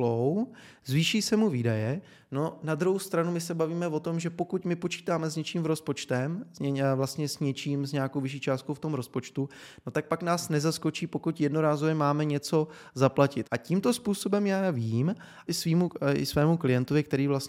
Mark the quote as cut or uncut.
cut